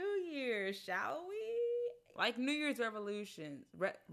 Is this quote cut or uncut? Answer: cut